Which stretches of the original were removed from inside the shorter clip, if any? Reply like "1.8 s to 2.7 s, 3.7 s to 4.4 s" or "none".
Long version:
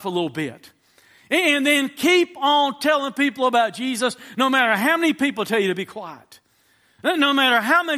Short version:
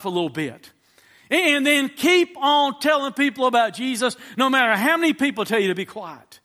none